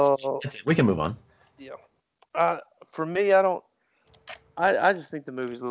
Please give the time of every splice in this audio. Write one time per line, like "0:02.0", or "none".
none